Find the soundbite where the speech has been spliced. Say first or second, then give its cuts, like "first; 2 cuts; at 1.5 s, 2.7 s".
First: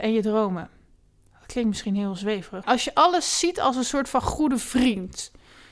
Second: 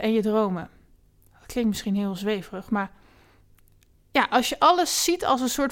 first; 1 cut; at 2.6 s